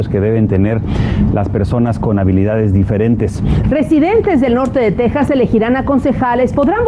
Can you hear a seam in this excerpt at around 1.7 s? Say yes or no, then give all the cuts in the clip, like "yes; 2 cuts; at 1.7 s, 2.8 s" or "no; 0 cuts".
no; 1 cut; at 3.6 s